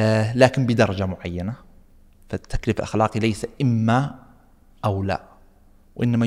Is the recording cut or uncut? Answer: uncut